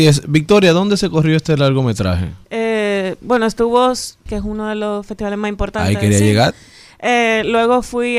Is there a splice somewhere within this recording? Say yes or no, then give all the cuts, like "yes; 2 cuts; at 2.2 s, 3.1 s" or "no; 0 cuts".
yes; 2 cuts; at 2.4 s, 4.3 s